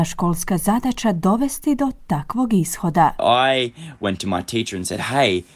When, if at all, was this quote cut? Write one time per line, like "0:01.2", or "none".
none